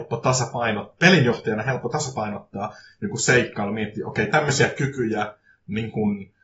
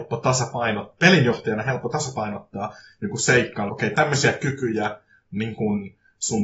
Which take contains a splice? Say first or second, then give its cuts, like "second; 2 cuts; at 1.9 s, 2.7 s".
second; 1 cut; at 3.7 s